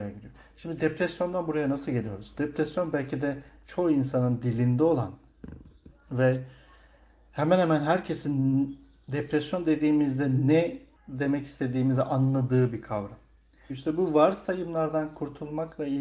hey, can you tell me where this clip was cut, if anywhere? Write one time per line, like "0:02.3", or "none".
0:13.7